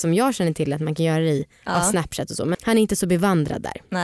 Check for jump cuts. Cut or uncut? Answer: cut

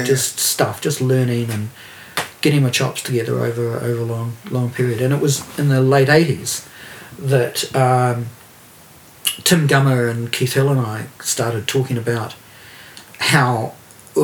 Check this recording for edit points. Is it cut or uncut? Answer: uncut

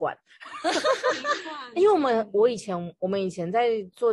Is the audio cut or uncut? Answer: uncut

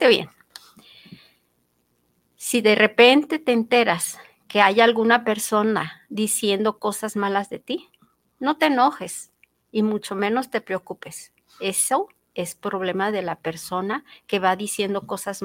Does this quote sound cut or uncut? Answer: uncut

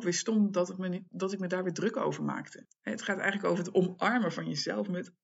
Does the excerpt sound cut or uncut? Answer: cut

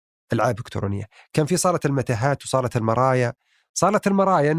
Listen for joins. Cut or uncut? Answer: uncut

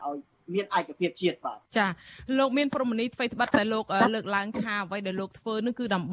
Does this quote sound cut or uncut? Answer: cut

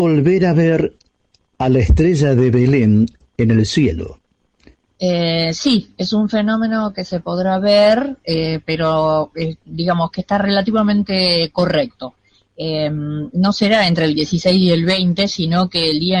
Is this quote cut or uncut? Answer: cut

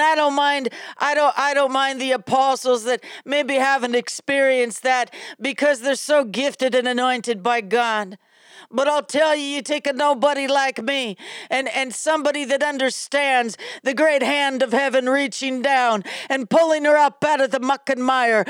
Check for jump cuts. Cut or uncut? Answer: cut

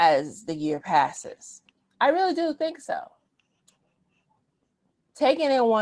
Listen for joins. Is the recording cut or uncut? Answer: uncut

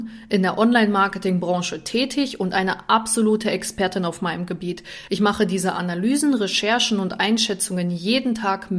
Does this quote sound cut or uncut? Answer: uncut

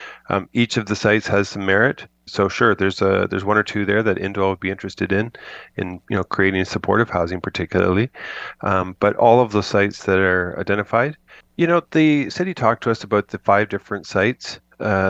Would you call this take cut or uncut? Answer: cut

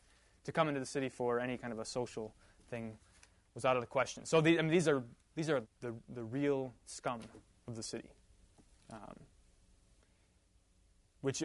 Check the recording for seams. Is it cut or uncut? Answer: cut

